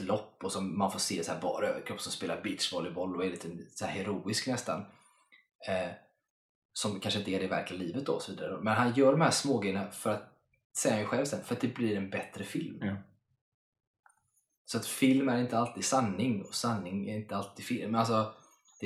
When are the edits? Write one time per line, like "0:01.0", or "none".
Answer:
none